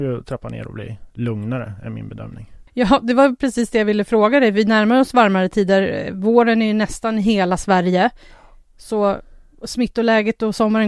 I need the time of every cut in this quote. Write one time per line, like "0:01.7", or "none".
0:02.7